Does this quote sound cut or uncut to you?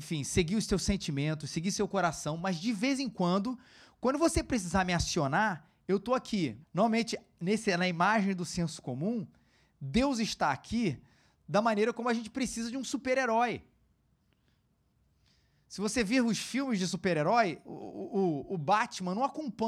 cut